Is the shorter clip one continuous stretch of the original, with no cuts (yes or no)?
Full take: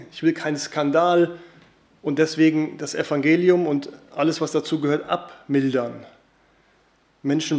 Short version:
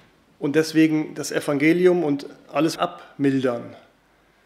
no